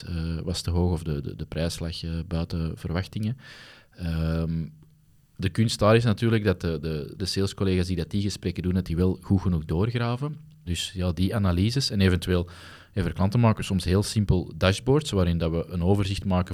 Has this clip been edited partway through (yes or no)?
yes